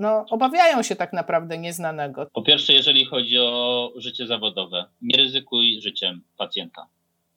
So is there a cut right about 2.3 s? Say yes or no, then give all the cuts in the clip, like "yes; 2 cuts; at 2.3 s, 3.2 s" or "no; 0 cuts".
yes; 1 cut; at 2.3 s